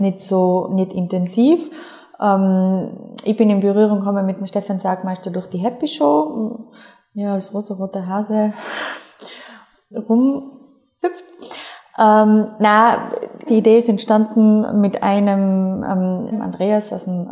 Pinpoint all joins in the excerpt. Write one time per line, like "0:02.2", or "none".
0:13.5
0:16.3